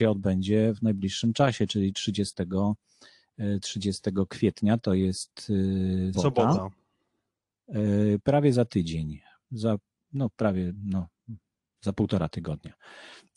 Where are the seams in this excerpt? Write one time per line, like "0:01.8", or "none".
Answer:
0:06.1